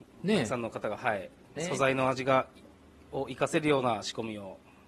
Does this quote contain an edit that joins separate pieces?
yes; 1 cut; at 1.6 s

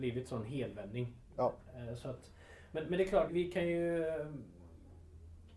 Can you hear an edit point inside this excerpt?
yes; 1 cut; at 3.3 s

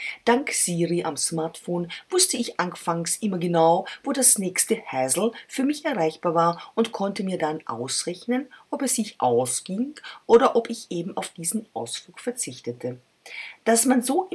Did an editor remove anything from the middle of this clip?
no; 0 cuts

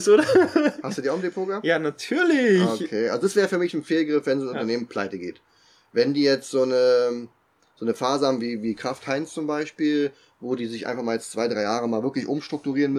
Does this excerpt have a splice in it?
no; 0 cuts

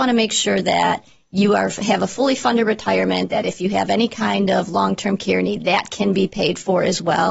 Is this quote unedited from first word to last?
yes; 0 cuts

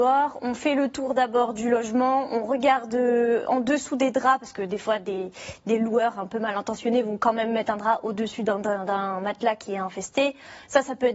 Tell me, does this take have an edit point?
no; 0 cuts

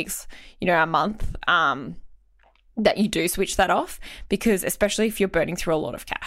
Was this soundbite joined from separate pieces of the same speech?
no; 0 cuts

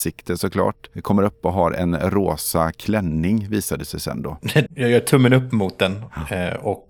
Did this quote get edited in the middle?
yes; 1 cut; at 4.7 s

